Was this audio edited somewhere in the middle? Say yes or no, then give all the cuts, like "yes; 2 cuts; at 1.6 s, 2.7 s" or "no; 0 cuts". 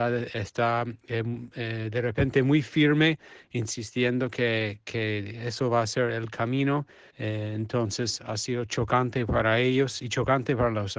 yes; 1 cut; at 7.1 s